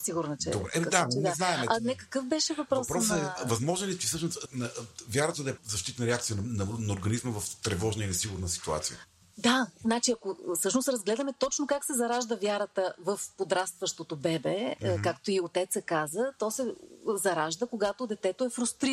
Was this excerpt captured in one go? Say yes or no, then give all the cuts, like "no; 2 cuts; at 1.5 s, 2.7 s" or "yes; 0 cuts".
no; 2 cuts; at 4.4 s, 5.6 s